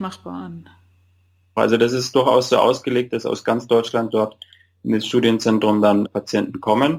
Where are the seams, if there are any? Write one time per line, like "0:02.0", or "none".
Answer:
0:01.6
0:06.0

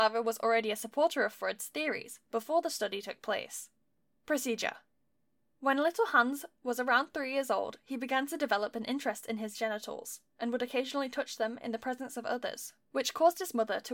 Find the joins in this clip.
none

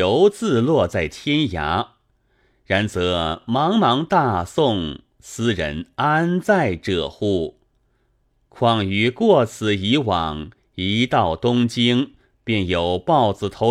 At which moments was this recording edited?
none

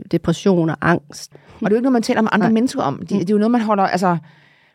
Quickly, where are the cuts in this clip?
0:01.3

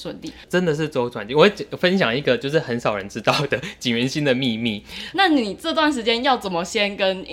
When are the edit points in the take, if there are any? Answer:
0:05.1

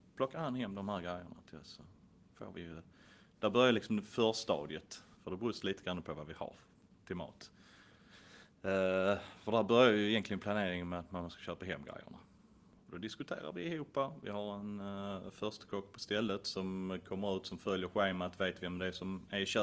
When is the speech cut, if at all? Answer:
0:05.2

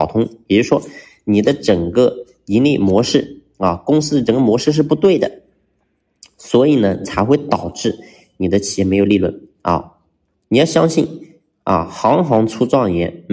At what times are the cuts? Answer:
none

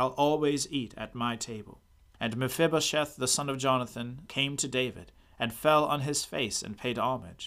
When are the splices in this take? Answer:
0:02.1
0:04.3

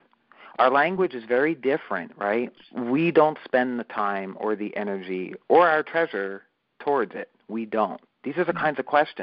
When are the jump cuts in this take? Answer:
0:02.6
0:08.1

